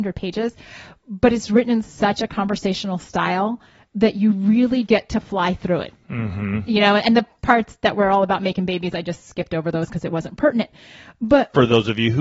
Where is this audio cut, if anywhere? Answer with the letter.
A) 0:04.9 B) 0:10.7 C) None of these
A